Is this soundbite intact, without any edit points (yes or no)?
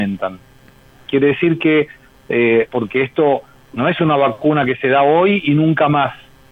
no